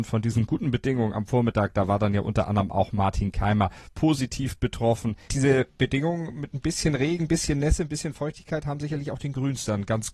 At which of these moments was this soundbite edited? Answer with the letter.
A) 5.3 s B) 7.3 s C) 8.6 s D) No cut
A